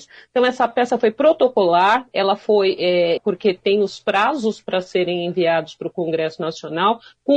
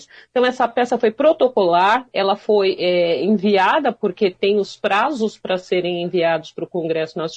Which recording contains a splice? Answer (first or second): first